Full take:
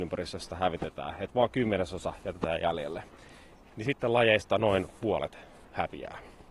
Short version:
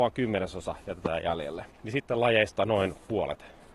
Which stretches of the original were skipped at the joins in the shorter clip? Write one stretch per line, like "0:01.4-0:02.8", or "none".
0:03.1-0:03.6